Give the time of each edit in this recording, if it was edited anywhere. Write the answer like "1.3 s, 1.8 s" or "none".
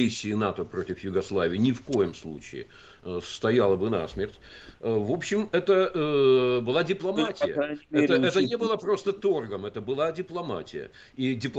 4.7 s